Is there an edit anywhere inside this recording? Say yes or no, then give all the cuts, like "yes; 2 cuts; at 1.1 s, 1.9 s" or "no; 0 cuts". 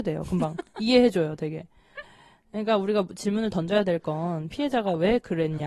no; 0 cuts